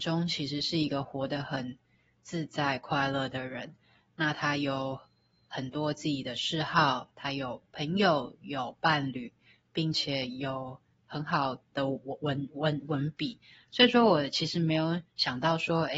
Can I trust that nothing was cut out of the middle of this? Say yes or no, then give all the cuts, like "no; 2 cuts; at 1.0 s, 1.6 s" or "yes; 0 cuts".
yes; 0 cuts